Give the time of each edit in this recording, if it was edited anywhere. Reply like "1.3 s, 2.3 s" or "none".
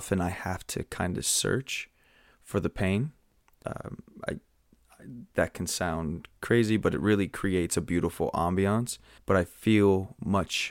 3.6 s, 9.2 s